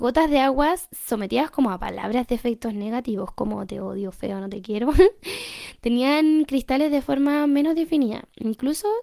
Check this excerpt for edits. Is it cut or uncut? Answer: uncut